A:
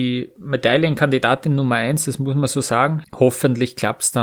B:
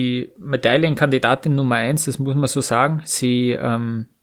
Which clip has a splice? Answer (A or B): A